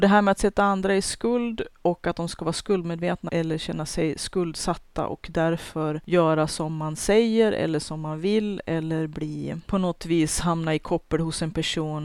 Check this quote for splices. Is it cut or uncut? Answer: cut